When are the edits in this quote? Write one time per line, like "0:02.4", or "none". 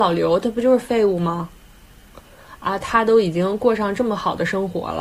0:02.2